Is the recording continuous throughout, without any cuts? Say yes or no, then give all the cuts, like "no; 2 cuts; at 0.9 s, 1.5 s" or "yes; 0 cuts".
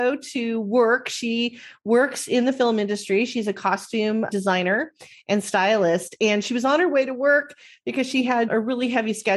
yes; 0 cuts